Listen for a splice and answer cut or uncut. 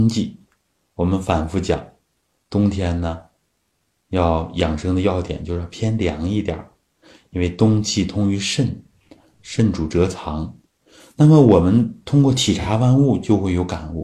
uncut